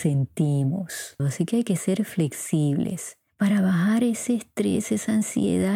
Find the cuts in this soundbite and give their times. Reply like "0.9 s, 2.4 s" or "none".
1.2 s